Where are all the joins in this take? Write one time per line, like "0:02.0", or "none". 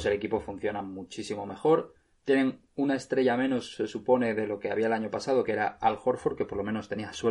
none